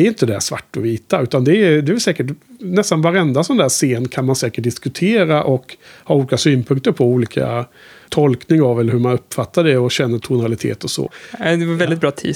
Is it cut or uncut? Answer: cut